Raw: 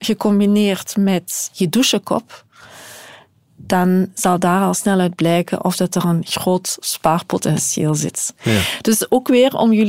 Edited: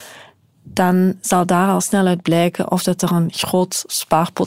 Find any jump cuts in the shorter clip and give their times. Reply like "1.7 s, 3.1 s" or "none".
none